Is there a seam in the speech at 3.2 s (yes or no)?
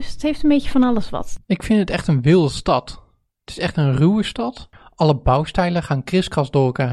no